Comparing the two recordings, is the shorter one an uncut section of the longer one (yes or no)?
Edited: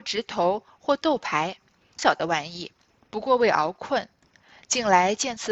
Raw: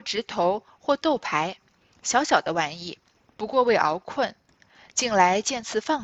no